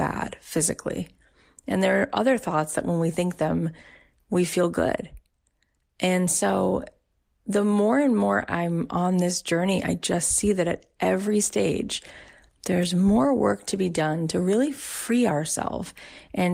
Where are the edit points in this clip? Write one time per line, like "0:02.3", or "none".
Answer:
none